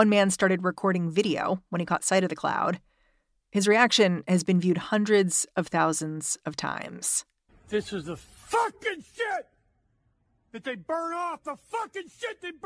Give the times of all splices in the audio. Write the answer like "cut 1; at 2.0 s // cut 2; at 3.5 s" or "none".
cut 1; at 7.5 s